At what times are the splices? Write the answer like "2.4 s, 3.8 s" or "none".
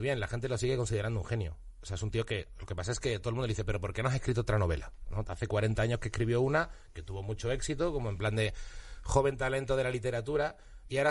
none